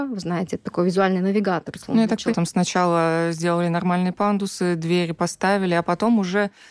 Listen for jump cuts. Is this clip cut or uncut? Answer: cut